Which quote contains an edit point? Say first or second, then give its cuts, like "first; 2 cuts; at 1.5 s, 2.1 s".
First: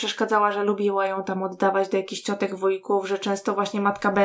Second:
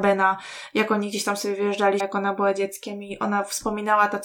second; 1 cut; at 2.0 s